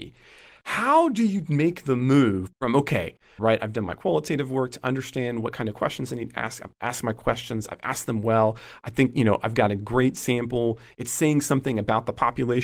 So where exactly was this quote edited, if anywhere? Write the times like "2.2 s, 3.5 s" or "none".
3.4 s